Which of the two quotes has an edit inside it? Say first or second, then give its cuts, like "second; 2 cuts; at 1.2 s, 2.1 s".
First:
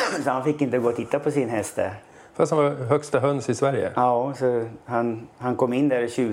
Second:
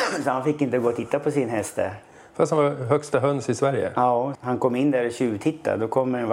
second; 1 cut; at 4.3 s